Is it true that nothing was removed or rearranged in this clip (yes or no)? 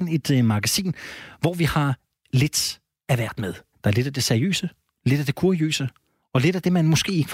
no